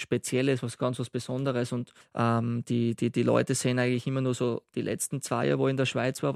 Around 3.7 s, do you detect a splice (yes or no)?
no